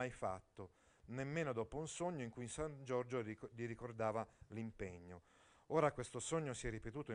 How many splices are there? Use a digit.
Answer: 0